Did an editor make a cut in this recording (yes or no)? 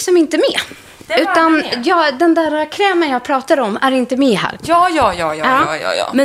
yes